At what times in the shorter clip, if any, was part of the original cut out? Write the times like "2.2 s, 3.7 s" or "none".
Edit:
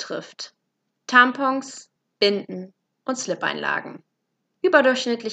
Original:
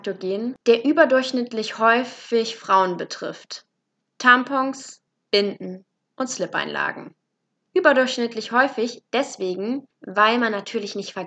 none